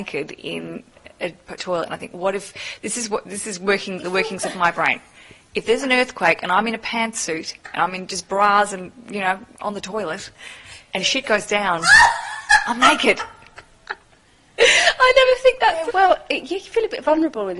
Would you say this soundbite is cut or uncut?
cut